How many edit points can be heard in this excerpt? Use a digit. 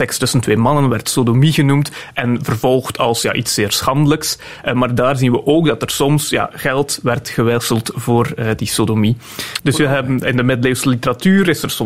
1